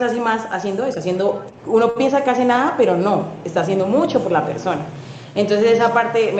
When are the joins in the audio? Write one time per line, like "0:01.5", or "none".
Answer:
none

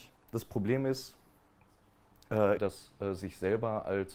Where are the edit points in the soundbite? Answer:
0:02.6

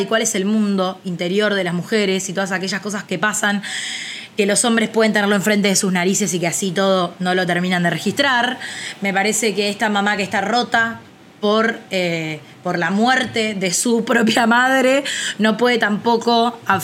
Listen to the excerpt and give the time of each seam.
none

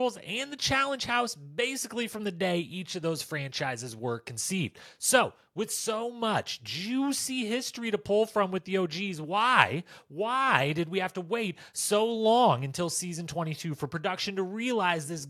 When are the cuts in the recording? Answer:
none

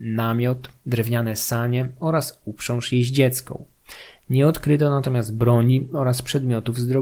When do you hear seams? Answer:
none

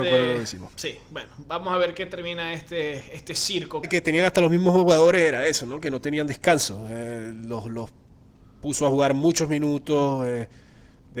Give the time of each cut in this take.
0:03.8

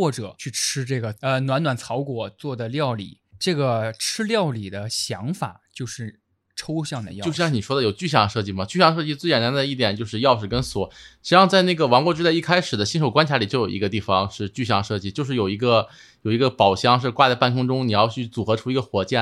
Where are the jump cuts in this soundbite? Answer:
none

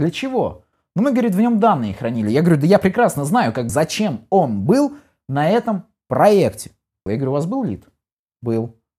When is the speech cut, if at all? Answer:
0:03.7
0:07.1

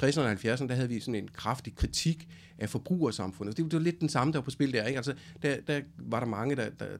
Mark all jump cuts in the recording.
none

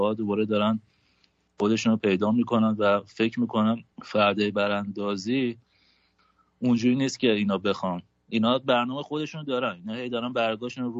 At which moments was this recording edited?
0:03.9

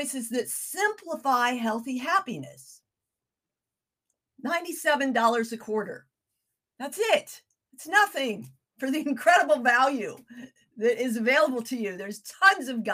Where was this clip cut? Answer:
none

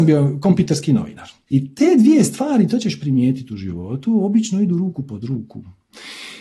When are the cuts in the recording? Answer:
0:01.5

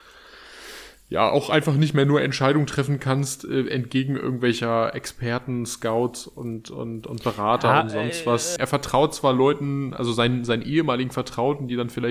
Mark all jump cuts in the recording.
0:08.6

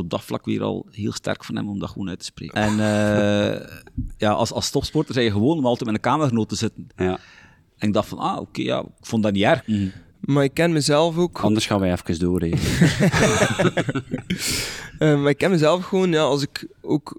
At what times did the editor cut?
0:02.5
0:09.6

